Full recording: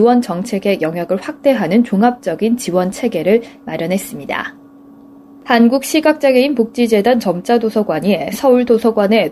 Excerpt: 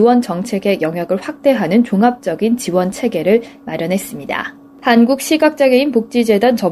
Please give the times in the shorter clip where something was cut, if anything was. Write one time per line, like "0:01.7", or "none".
0:04.7

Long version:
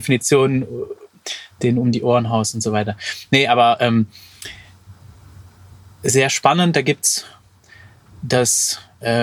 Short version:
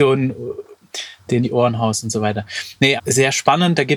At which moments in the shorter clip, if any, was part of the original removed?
0:01.4
0:03.0

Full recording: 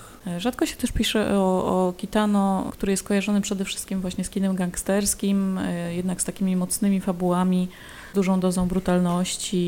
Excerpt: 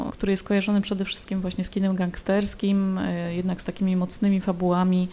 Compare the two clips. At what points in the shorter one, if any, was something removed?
none

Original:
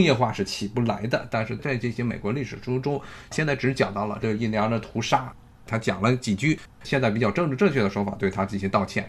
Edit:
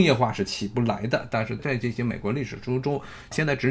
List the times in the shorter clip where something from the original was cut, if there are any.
none

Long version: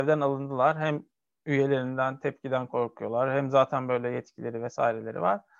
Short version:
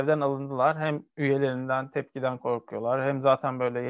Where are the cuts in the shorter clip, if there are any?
0:01.1

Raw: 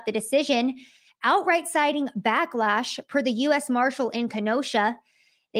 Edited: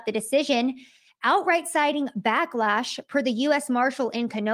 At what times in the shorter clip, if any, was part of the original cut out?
none

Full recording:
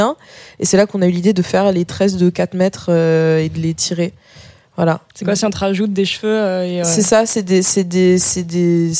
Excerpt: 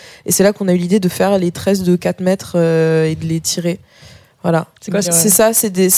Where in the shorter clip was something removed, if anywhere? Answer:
0:05.0

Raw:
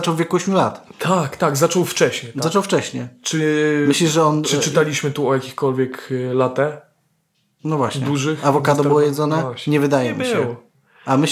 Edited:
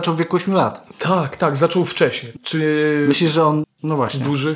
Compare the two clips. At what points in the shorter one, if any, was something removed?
0:02.4
0:03.6

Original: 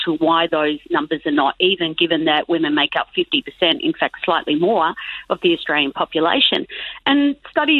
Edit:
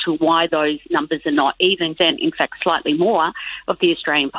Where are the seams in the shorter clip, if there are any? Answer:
0:01.9

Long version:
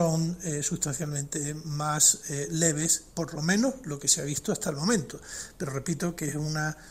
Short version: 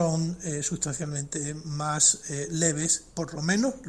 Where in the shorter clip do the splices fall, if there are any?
none

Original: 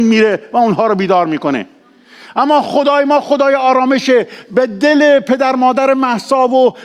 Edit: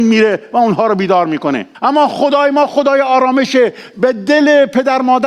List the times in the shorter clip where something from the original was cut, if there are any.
0:01.7

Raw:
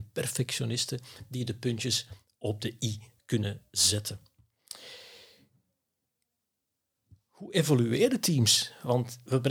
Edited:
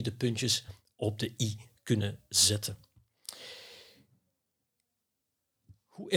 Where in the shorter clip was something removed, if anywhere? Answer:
none

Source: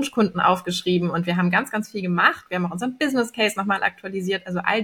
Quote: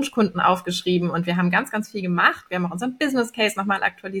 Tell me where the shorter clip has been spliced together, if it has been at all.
none

